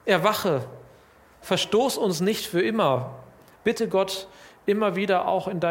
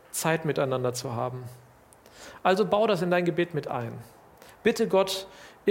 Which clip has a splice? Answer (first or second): first